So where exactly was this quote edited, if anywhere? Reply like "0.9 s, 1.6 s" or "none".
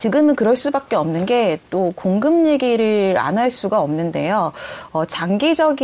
none